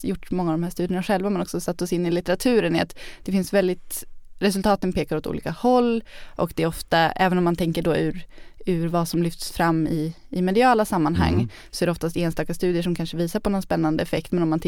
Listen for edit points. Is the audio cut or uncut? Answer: uncut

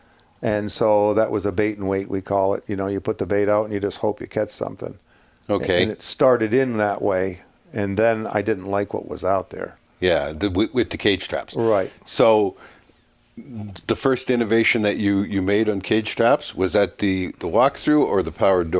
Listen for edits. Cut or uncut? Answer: cut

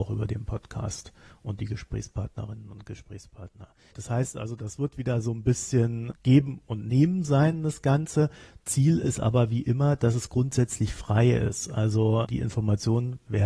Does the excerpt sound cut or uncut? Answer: uncut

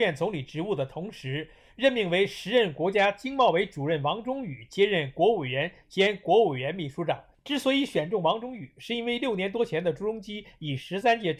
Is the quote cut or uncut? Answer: uncut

